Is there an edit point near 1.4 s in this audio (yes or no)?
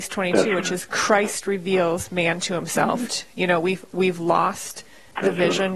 no